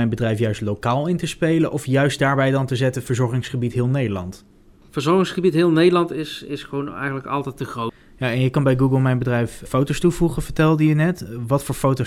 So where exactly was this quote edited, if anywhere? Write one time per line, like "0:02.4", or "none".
0:09.7